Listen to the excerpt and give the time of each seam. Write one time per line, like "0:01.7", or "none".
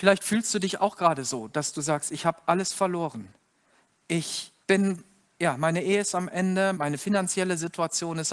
0:04.6
0:06.7